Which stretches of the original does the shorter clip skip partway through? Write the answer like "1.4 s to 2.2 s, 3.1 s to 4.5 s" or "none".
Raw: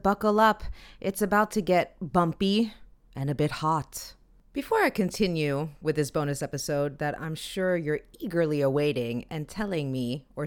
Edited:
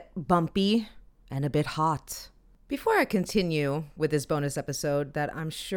none